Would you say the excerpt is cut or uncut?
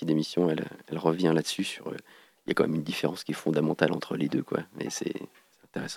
uncut